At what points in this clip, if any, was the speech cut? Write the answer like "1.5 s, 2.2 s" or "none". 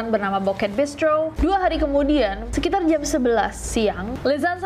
1.4 s, 2.5 s